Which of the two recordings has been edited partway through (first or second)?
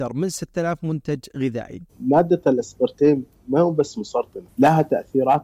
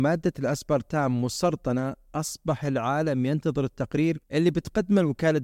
first